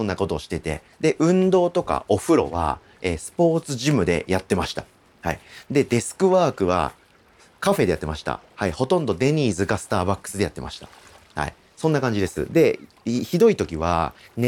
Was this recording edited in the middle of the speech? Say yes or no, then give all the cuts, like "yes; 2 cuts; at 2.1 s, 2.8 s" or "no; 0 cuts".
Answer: no; 0 cuts